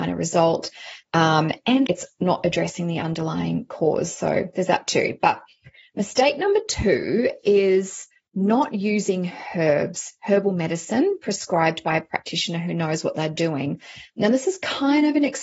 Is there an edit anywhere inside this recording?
yes; 1 cut; at 1.9 s

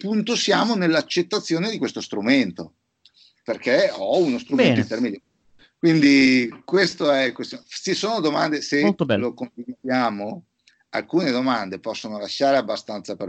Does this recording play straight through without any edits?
yes; 0 cuts

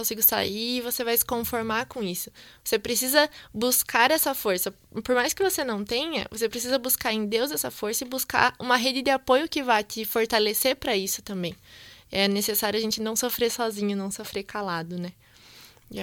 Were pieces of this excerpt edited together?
no; 0 cuts

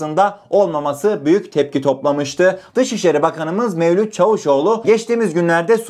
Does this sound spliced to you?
yes; 1 cut; at 2.7 s

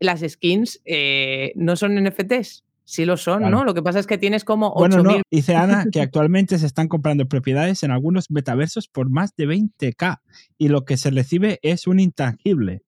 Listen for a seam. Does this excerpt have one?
yes; 1 cut; at 5.2 s

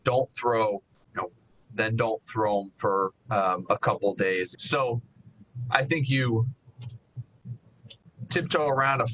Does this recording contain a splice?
yes; 3 cuts; at 1.6 s, 3.2 s, 4.5 s

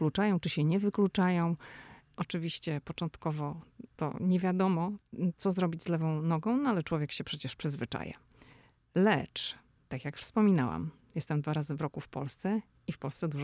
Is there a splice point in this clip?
yes; 1 cut; at 2.1 s

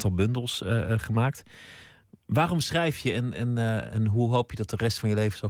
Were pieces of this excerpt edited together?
no; 0 cuts

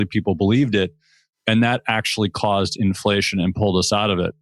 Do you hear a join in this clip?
no; 0 cuts

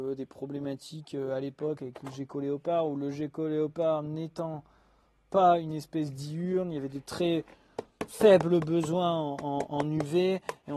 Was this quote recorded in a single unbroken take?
yes; 0 cuts

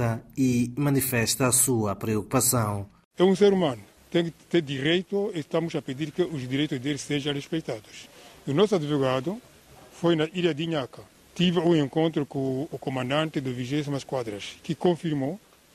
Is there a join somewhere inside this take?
no; 0 cuts

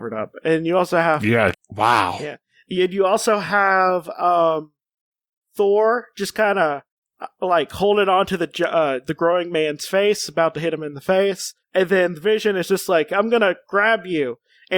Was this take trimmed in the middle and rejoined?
yes; 2 cuts; at 1.5 s, 11.6 s

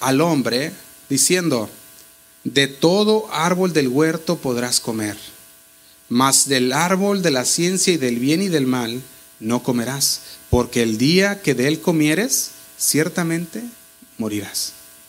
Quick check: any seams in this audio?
no; 0 cuts

